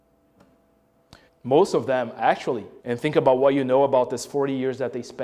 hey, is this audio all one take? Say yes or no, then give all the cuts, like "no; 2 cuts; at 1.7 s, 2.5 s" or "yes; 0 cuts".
no; 2 cuts; at 1.3 s, 2.8 s